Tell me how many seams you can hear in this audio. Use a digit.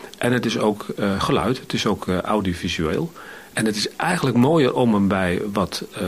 1